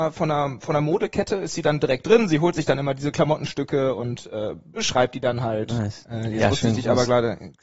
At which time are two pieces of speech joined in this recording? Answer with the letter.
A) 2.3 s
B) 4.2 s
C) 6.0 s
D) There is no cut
C